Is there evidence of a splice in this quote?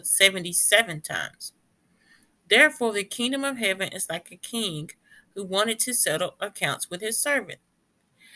no; 0 cuts

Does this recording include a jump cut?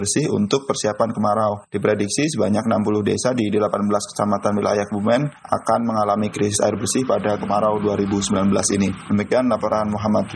no; 0 cuts

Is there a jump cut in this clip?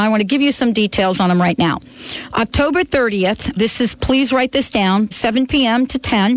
yes; 2 cuts; at 3.6 s, 5.1 s

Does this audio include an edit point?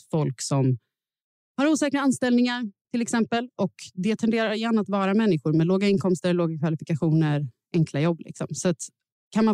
no; 0 cuts

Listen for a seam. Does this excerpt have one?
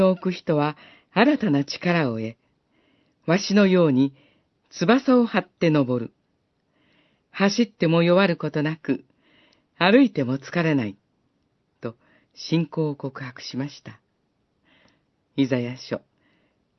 no; 0 cuts

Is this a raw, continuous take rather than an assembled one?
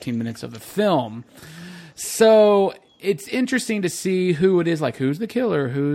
yes; 0 cuts

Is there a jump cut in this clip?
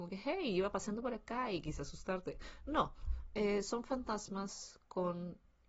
no; 0 cuts

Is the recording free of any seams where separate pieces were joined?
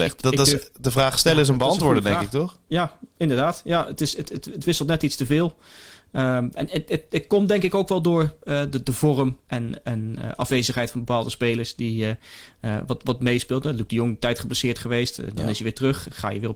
yes; 0 cuts

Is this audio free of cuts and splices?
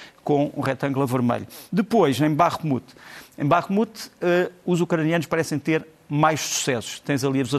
yes; 0 cuts

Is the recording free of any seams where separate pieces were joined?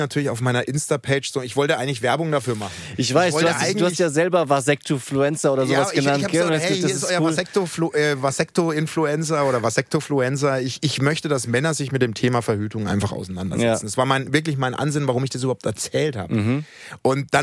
yes; 0 cuts

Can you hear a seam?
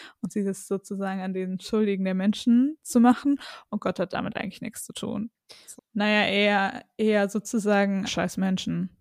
yes; 2 cuts; at 5.8 s, 8.0 s

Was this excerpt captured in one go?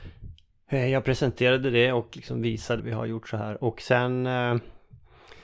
no; 1 cut; at 2.8 s

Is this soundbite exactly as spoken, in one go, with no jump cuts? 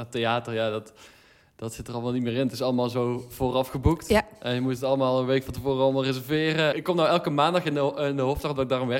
no; 1 cut; at 6.7 s

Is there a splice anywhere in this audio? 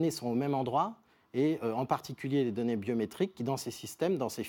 no; 0 cuts

